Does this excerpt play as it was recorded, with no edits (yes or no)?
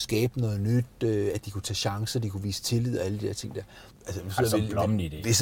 no